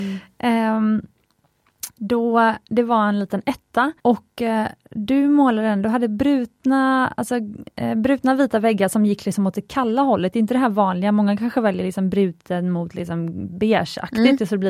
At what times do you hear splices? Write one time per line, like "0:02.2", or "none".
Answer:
0:04.0